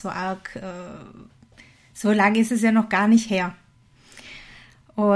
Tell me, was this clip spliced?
no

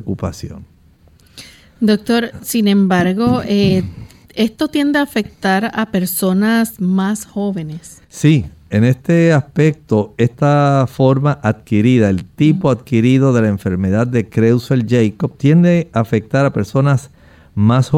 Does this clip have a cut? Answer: no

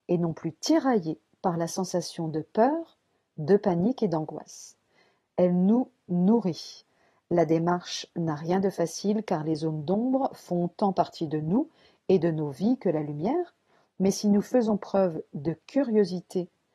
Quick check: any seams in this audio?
yes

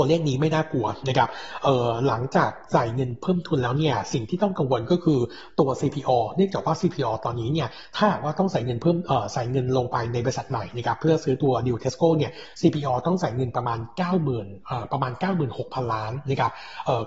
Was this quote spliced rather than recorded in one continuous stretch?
no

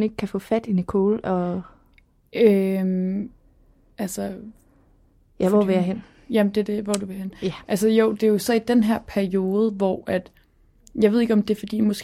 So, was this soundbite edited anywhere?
no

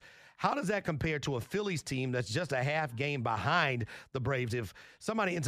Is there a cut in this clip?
yes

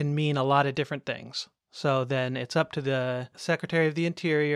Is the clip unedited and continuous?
yes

